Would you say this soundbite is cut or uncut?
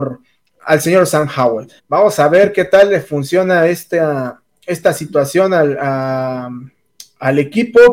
cut